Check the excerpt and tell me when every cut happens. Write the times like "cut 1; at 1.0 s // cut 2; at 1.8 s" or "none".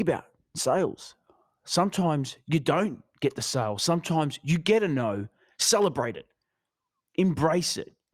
none